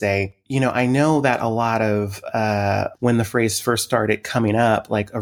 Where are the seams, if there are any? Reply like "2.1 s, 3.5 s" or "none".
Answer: 2.9 s